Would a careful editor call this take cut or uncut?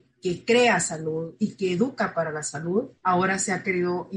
cut